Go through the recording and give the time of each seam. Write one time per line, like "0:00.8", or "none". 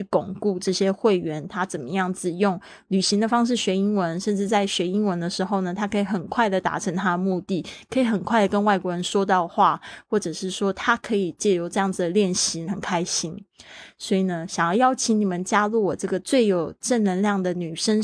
0:12.7